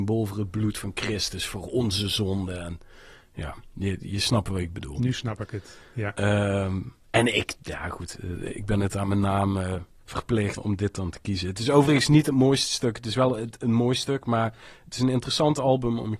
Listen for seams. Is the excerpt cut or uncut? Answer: cut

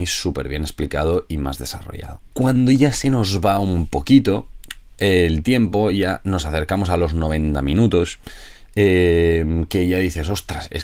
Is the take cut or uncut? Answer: cut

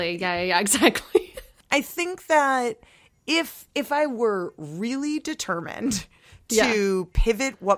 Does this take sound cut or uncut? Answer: uncut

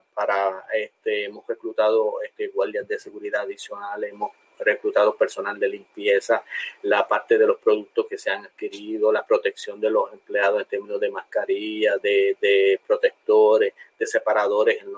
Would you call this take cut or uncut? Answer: uncut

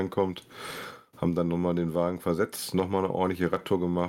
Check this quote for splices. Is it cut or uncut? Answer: uncut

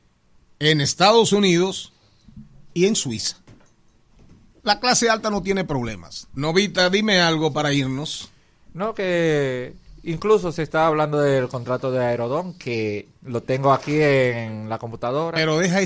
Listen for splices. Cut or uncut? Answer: cut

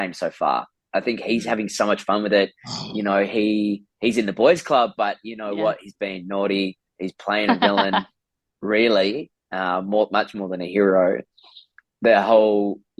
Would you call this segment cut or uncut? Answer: uncut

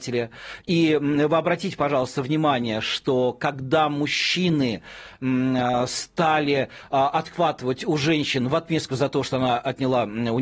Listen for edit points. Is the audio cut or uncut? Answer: uncut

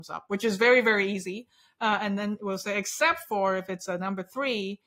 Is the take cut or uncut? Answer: uncut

